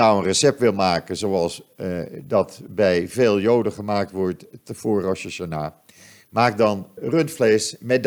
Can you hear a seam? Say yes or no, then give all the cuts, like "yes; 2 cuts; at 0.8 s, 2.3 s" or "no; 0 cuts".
yes; 1 cut; at 7.0 s